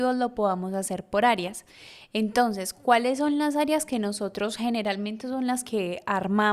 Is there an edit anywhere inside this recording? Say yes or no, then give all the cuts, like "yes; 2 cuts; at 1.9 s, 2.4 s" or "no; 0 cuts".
no; 0 cuts